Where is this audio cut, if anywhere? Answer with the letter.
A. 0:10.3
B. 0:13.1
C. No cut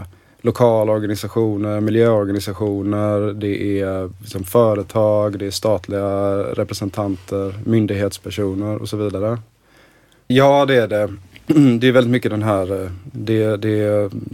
A